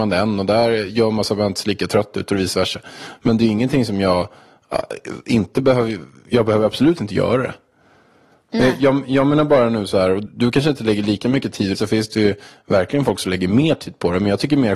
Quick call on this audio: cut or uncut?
cut